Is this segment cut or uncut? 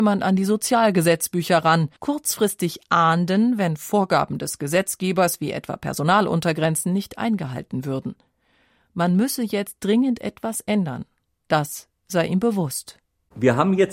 cut